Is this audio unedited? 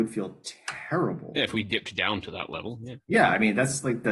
yes; 0 cuts

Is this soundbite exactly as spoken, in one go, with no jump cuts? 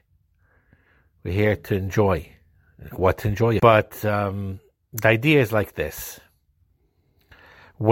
no; 1 cut; at 3.6 s

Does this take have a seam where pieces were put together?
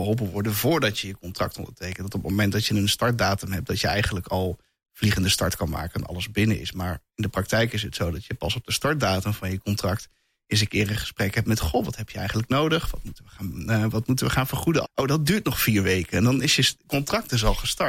yes; 1 cut; at 14.8 s

